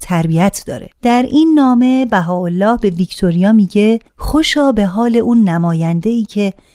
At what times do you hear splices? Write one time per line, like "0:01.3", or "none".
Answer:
0:00.9
0:04.1